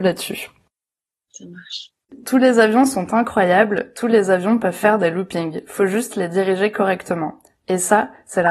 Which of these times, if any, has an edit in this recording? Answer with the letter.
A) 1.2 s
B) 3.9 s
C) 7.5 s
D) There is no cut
D